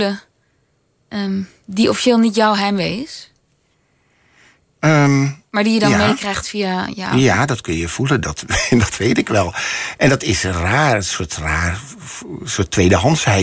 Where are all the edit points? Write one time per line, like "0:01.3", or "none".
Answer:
none